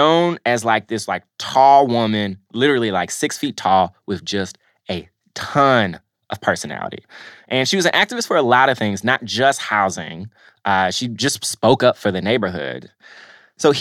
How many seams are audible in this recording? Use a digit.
0